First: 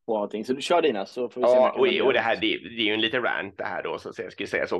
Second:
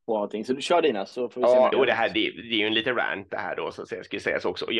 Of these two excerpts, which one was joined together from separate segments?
second; 1 cut; at 1.7 s

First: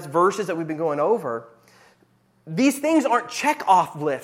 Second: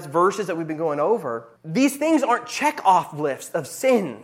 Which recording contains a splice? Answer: second; 1 cut; at 1.6 s

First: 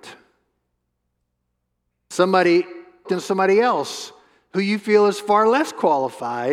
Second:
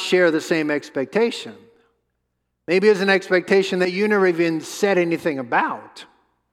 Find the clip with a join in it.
first; 1 cut; at 3.1 s

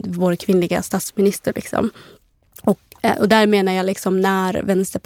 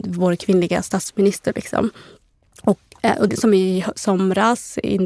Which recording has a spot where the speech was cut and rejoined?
second; 1 cut; at 3.3 s

